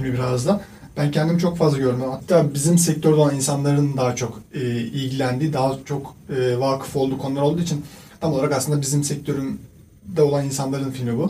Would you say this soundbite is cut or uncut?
uncut